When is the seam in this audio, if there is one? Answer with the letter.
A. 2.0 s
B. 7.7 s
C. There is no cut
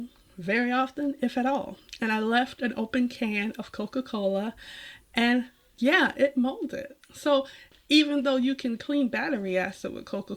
B